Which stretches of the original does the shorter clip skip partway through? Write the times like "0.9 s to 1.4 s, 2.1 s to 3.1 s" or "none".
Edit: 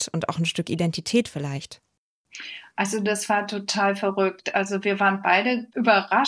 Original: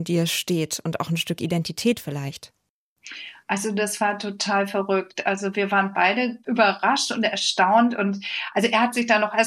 none